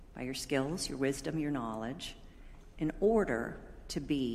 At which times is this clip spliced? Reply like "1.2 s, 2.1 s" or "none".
none